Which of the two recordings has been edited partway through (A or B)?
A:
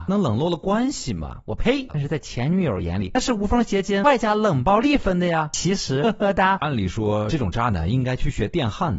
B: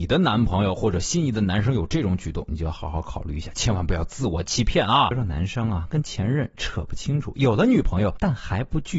A